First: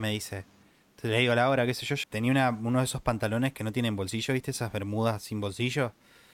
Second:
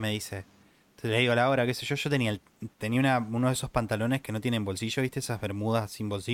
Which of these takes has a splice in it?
first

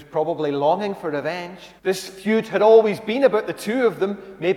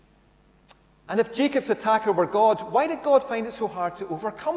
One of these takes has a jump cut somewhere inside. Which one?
first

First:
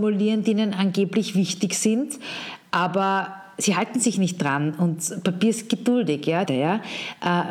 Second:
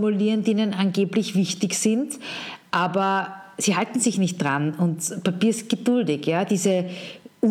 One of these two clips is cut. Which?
first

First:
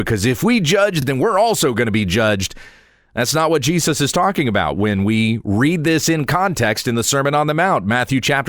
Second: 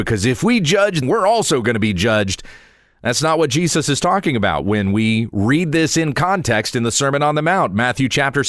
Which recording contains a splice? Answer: second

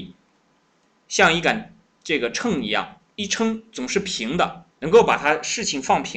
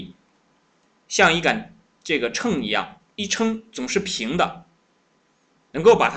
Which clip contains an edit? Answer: first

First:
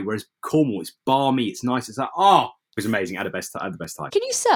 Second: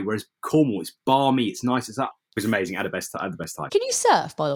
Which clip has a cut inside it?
second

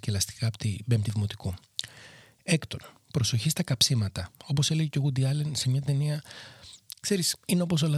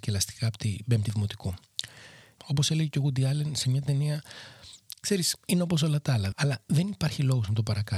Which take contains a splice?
second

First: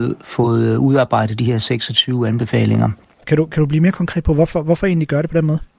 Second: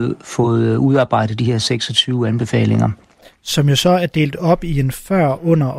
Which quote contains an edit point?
first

